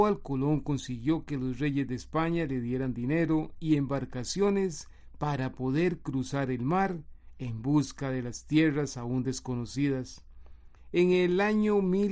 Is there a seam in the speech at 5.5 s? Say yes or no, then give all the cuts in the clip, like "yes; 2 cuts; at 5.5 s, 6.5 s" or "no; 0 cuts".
no; 1 cut; at 10.8 s